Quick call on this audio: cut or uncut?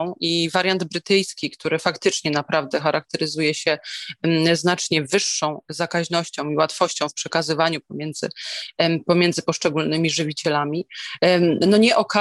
uncut